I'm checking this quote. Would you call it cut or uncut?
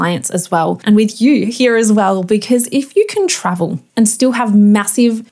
uncut